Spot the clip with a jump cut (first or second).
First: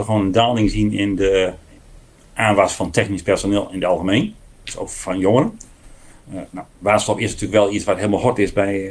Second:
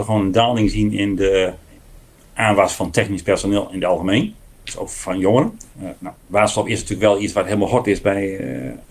second